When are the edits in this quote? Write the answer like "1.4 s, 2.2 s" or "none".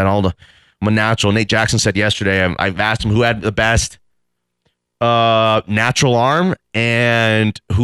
none